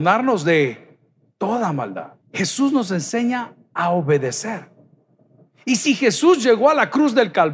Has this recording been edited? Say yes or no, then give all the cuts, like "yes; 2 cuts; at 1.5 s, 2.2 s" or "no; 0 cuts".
yes; 1 cut; at 2.2 s